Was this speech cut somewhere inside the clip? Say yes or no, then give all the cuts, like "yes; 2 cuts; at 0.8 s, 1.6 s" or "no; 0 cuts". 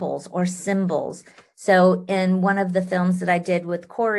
no; 0 cuts